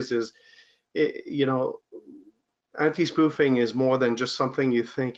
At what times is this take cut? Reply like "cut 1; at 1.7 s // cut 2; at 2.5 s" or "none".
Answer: none